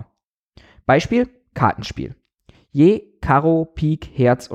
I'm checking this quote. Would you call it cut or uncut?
cut